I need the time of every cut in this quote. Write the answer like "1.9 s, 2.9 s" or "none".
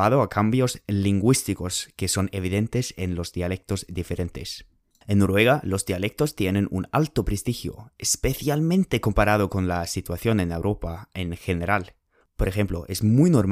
none